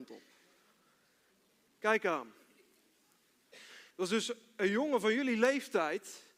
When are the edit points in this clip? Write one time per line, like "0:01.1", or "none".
0:03.9